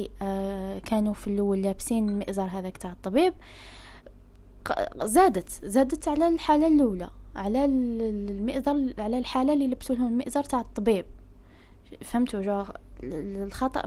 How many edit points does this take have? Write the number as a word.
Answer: zero